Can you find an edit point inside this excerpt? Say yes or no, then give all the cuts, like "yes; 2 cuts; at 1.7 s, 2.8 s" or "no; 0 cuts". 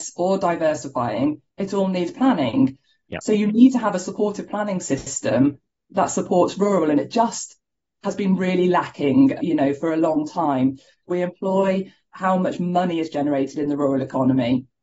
yes; 2 cuts; at 9.4 s, 11.1 s